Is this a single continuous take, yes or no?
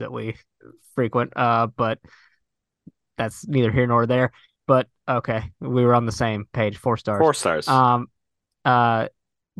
yes